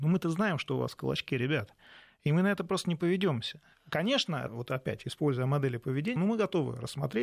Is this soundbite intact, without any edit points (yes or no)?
no